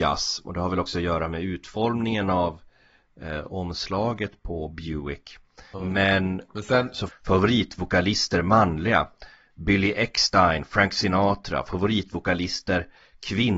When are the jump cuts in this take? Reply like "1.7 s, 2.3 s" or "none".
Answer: 5.7 s, 7.1 s